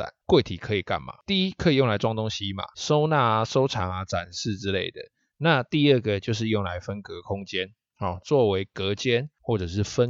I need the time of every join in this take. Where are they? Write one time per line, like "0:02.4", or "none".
none